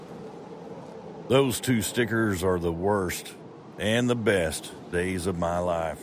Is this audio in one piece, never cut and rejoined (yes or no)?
yes